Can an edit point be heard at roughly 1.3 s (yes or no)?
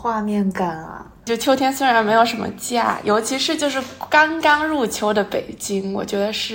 yes